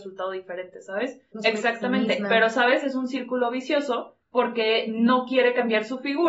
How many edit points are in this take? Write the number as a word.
two